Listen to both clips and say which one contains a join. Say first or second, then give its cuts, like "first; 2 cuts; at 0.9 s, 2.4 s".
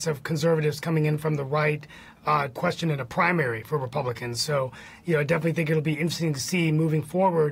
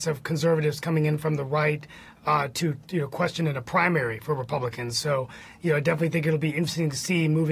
first; 1 cut; at 2.5 s